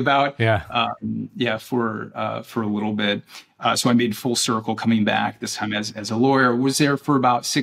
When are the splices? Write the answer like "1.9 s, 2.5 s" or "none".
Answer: none